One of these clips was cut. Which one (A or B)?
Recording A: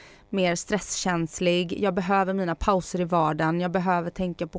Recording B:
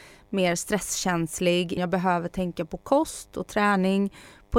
B